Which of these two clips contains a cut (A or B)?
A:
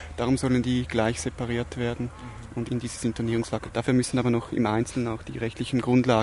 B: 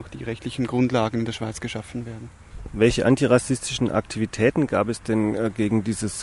A